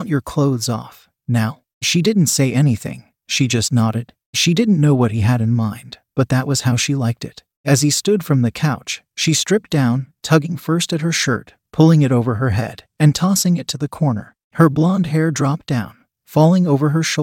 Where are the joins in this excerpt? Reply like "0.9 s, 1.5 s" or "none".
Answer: 12.9 s